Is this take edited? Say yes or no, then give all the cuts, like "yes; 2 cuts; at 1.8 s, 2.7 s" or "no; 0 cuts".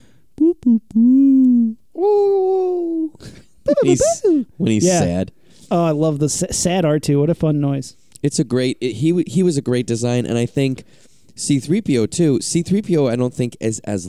yes; 1 cut; at 8.9 s